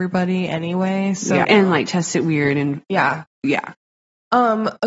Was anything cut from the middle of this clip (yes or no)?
yes